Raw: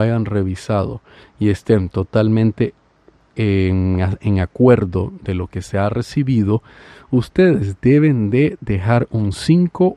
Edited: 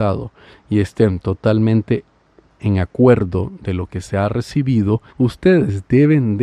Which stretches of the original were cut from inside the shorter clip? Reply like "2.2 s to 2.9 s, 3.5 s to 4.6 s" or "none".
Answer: 3.3 s to 4.2 s, 6.7 s to 7.0 s

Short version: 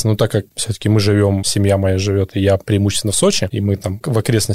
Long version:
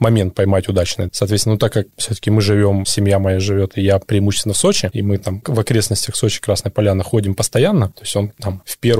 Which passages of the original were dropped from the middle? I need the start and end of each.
none

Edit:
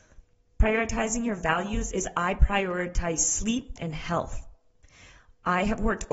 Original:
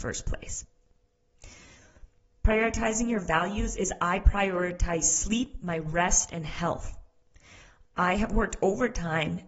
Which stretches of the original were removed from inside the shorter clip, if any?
5.6 s to 6.3 s

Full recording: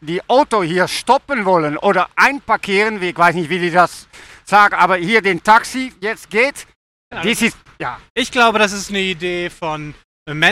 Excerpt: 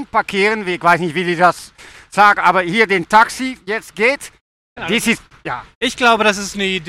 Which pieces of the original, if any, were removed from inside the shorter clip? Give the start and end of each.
none

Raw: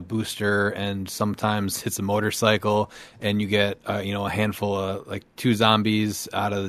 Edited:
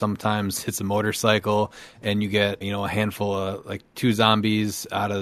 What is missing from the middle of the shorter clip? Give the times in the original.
3.8 s to 4.0 s

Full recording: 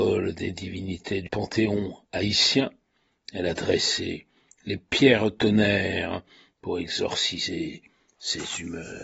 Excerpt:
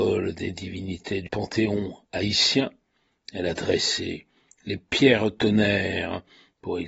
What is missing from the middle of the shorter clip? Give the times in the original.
none

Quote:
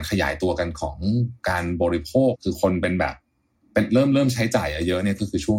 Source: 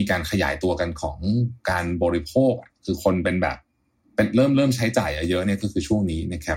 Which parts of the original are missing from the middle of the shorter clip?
2.5 s to 2.7 s

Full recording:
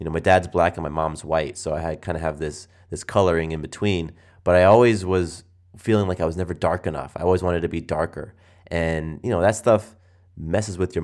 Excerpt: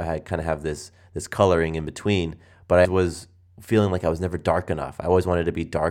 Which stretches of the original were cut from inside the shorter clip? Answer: 4.6 s to 5.0 s

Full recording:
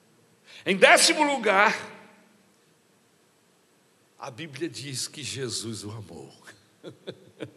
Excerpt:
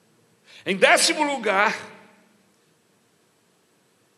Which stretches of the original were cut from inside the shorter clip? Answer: none

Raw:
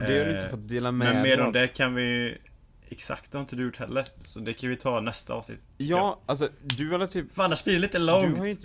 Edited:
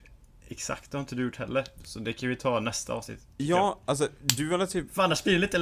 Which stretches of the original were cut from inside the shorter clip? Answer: none

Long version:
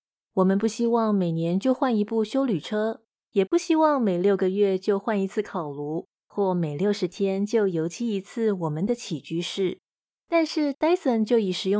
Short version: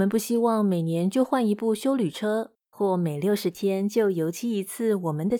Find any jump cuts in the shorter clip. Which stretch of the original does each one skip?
3.1 s to 6.2 s

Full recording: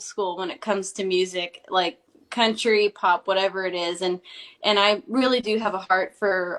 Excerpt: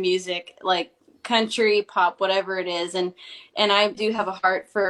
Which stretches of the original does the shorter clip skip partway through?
5.0 s to 5.4 s

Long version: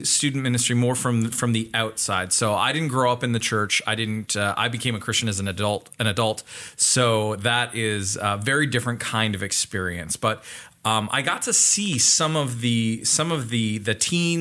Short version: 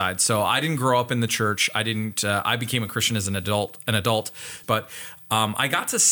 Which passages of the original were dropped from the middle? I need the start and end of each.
6.8 s to 10.2 s

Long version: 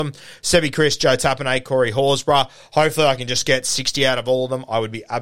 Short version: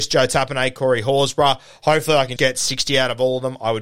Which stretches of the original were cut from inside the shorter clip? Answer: 3.3 s to 3.4 s

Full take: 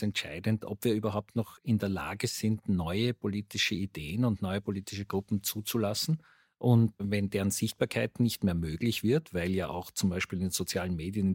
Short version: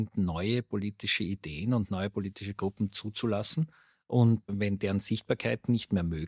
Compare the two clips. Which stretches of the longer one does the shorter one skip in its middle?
none

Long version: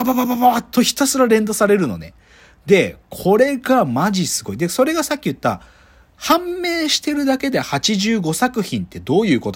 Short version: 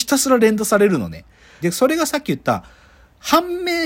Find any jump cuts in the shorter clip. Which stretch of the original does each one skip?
2.5 s to 4.6 s

